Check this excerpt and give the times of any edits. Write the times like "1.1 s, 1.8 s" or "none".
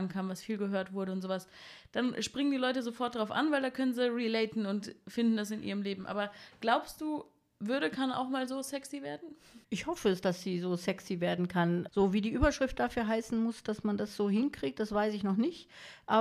9.6 s, 11.9 s